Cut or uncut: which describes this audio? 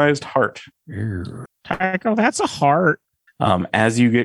cut